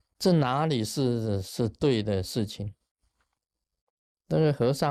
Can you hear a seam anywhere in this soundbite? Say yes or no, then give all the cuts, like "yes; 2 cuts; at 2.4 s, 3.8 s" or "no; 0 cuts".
no; 0 cuts